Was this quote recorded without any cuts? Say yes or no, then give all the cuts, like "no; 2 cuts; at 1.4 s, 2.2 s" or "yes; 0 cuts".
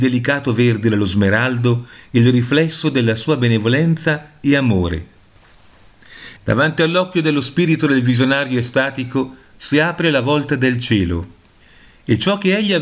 no; 1 cut; at 6.4 s